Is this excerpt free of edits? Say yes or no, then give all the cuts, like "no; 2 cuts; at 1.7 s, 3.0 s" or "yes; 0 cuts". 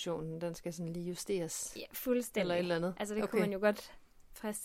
yes; 0 cuts